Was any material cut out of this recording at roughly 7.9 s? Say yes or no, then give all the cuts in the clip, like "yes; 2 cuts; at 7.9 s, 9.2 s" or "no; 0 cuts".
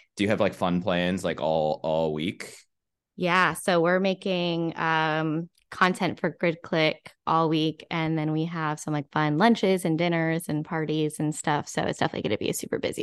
no; 0 cuts